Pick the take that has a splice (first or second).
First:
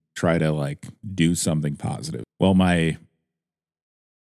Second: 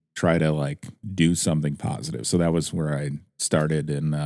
first